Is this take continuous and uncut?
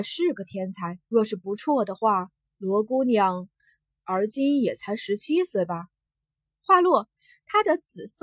no; 2 cuts; at 1.0 s, 6.1 s

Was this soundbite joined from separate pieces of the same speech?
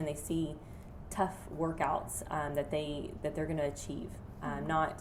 no; 0 cuts

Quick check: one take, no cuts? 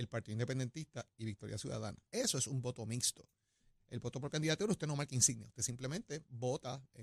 no; 1 cut; at 2.1 s

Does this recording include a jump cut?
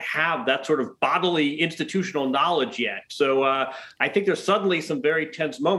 no; 0 cuts

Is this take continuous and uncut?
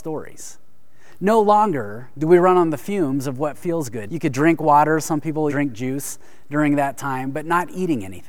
no; 2 cuts; at 4.1 s, 5.5 s

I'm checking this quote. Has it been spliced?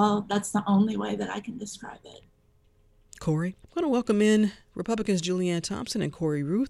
yes; 1 cut; at 3.6 s

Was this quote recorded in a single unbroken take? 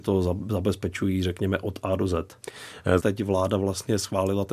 no; 1 cut; at 3.0 s

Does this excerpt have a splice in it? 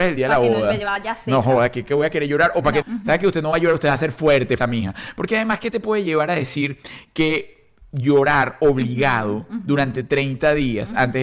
yes; 2 cuts; at 2.8 s, 4.6 s

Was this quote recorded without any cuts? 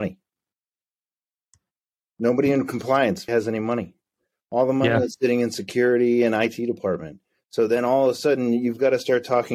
no; 1 cut; at 3.3 s

